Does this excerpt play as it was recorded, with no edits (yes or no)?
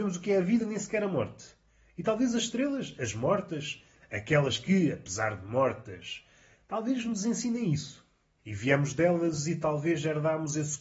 no